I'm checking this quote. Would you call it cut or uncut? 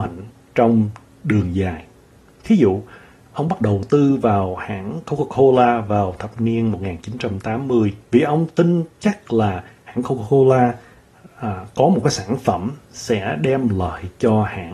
cut